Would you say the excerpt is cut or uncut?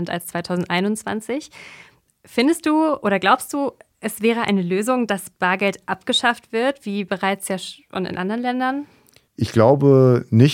uncut